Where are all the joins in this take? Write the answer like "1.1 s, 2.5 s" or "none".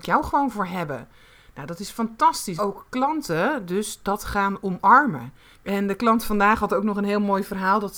2.6 s, 5.5 s